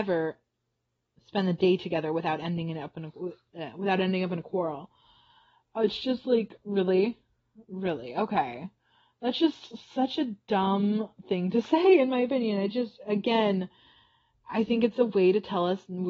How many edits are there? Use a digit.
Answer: 0